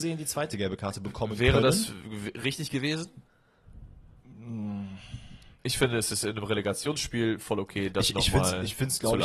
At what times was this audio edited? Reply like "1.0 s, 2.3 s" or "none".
none

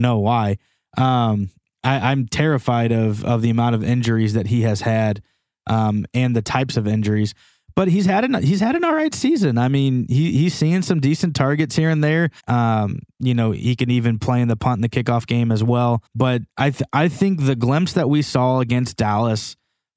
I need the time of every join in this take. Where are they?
12.4 s, 16.1 s

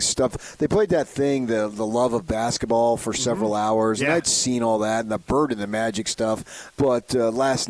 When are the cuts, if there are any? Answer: 6.7 s

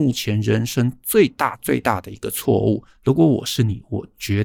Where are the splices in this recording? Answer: 1.6 s

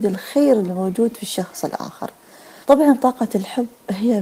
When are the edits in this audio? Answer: 2.6 s

